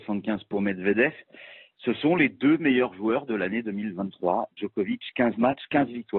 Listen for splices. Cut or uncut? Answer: uncut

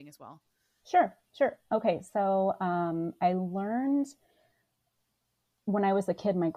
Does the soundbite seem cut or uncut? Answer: uncut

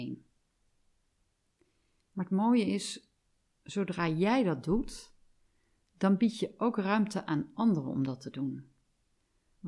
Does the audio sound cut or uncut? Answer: uncut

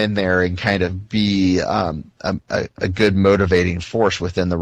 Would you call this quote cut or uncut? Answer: uncut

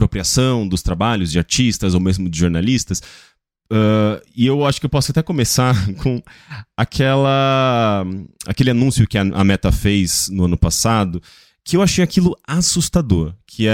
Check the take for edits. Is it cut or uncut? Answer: uncut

